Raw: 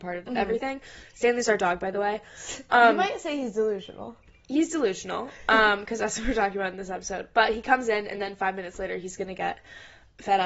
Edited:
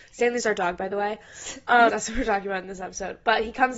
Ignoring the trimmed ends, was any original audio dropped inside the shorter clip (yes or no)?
yes